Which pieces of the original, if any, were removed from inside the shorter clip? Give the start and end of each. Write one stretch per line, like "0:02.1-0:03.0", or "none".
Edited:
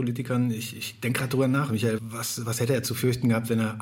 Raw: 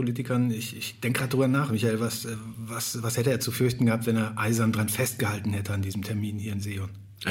0:02.0-0:02.5